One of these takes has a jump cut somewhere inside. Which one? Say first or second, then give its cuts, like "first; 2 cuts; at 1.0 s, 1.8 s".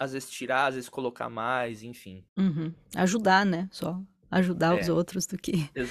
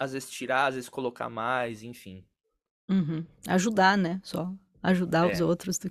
first; 1 cut; at 2.3 s